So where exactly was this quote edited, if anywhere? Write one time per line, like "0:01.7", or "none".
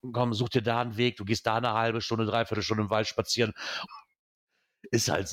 0:03.9